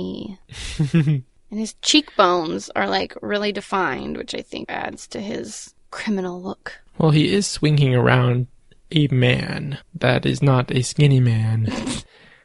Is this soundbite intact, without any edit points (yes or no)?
no